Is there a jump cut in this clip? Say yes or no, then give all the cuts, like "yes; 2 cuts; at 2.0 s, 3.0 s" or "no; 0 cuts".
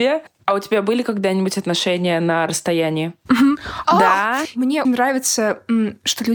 yes; 2 cuts; at 3.8 s, 4.8 s